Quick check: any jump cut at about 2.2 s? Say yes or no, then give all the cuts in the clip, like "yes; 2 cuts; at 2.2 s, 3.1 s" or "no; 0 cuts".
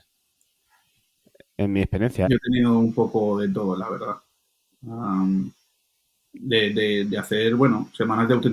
yes; 1 cut; at 2.2 s